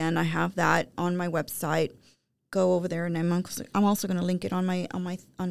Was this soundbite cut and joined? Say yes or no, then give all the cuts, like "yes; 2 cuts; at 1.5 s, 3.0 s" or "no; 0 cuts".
no; 0 cuts